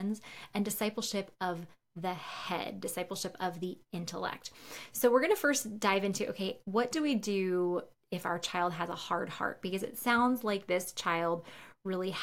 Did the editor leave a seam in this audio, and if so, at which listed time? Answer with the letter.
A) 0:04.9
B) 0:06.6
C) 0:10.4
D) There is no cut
D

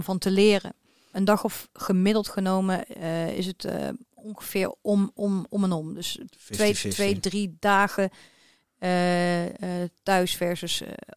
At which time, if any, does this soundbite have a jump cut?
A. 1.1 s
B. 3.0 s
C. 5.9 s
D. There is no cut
A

